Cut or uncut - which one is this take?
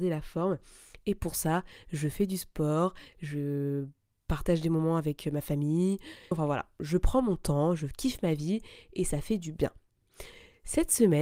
cut